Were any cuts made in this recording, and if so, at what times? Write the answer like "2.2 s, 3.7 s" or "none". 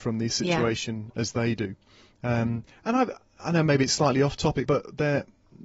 4.7 s